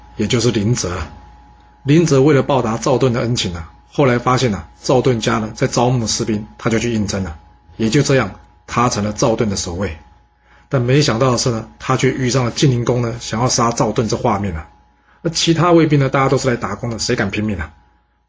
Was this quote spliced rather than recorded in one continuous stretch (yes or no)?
no